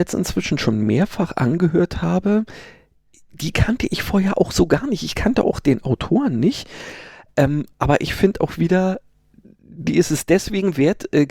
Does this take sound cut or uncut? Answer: uncut